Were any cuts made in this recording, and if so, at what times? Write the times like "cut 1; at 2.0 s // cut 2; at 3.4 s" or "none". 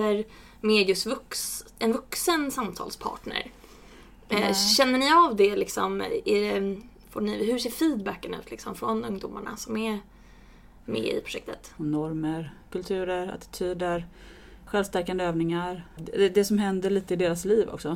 cut 1; at 11.8 s // cut 2; at 14.7 s // cut 3; at 16.0 s